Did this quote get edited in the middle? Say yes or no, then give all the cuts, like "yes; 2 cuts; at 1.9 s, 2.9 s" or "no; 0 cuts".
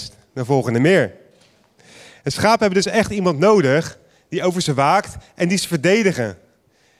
no; 0 cuts